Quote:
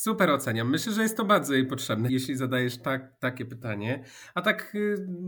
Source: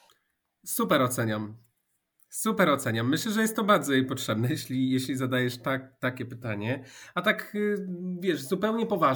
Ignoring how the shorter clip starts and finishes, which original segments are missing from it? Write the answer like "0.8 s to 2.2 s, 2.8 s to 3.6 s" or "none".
4.5 s to 4.9 s

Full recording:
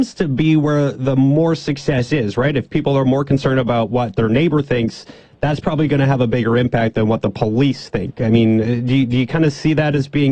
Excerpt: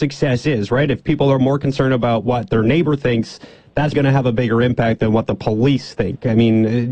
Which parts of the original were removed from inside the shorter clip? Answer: 5.6 s to 5.9 s

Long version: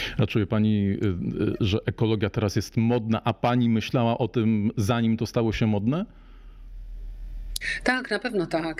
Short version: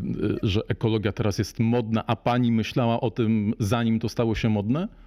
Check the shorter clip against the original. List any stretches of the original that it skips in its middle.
none

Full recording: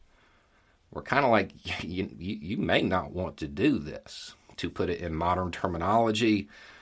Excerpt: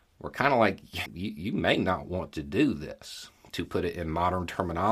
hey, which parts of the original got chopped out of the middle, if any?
1.8 s to 2.1 s

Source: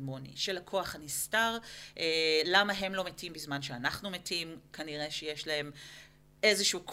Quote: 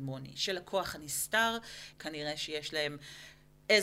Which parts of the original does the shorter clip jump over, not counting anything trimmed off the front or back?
1.9 s to 4.7 s

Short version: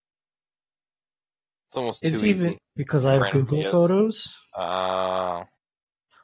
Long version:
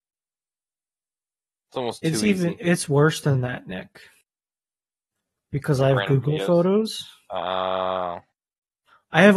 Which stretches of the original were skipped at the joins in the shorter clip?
2.6 s to 5.3 s

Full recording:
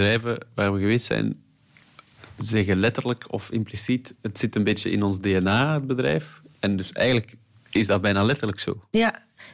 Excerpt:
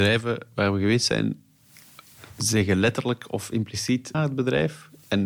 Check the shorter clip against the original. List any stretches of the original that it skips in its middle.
4.1 s to 5.7 s

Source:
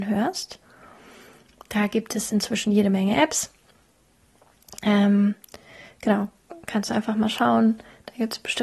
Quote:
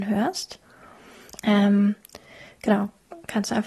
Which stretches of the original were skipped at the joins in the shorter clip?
1.3 s to 4.7 s

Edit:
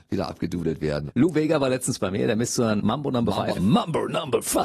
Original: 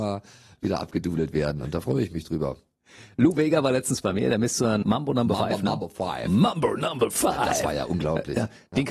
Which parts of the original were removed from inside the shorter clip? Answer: 1.6 s to 3.1 s, 5.6 s to 6.2 s

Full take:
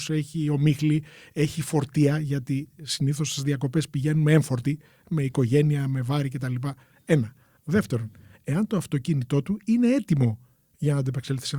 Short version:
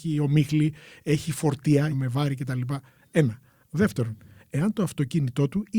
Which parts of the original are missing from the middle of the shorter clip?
2.2 s to 5.8 s

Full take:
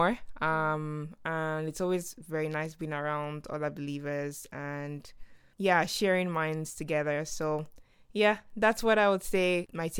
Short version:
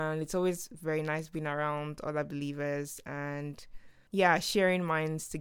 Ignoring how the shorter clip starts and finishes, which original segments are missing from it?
none

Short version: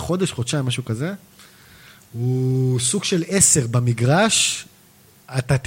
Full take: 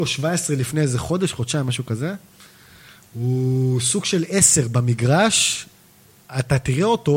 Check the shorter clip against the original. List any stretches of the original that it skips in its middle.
none

